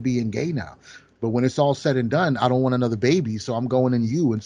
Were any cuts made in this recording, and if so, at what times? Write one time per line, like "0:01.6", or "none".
0:01.2